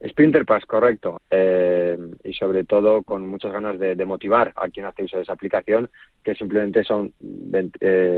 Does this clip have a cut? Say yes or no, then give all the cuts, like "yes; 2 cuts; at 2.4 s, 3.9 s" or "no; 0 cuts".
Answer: yes; 2 cuts; at 1.2 s, 4.6 s